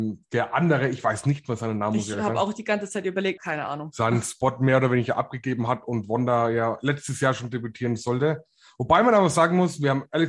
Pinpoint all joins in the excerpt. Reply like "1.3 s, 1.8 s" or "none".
3.4 s